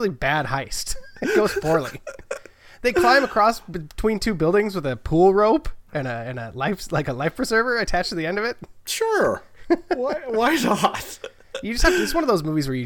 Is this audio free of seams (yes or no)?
yes